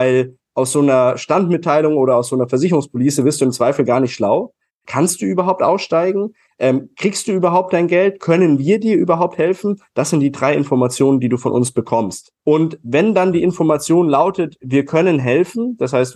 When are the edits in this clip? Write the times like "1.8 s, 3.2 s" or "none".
4.8 s, 12.4 s